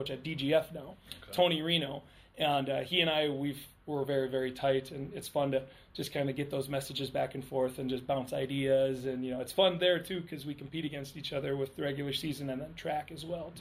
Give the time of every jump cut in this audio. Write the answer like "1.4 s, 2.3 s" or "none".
none